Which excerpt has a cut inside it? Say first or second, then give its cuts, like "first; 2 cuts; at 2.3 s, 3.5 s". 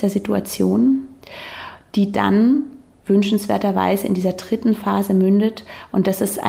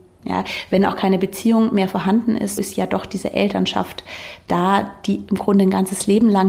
second; 1 cut; at 2.6 s